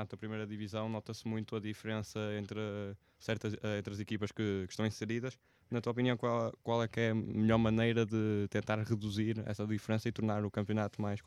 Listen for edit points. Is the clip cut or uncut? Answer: uncut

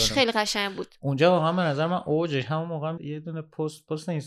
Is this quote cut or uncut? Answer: cut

